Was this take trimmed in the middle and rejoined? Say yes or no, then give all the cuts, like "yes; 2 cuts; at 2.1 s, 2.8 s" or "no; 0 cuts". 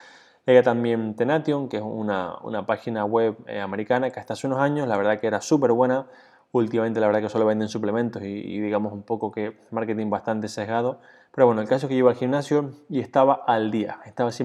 no; 0 cuts